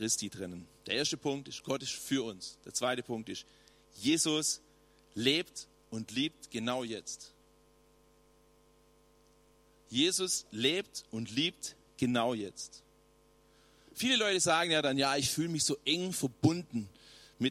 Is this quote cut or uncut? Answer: uncut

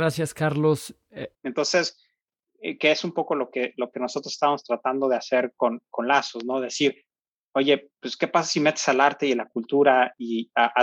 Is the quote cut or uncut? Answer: cut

